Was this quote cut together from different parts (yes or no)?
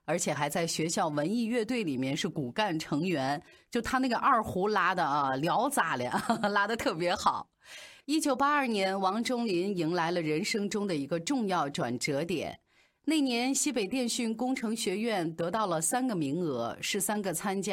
no